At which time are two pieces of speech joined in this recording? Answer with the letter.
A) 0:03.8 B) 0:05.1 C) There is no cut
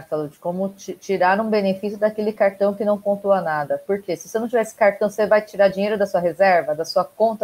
C